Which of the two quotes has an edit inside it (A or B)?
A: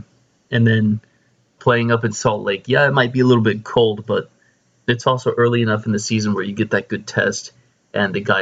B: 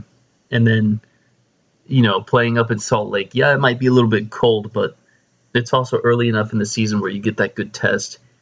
A